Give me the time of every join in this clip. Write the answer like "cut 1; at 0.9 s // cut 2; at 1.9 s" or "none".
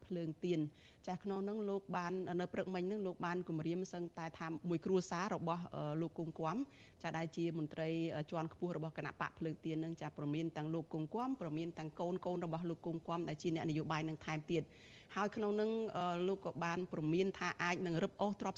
none